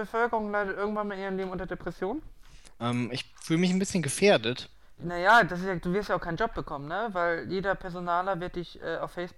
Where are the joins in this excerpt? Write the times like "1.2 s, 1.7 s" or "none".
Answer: 2.7 s, 5.0 s